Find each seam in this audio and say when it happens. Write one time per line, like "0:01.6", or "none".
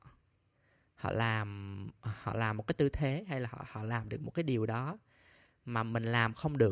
none